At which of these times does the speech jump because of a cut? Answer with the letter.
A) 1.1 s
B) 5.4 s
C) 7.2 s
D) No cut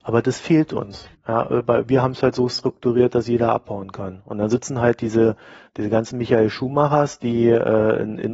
A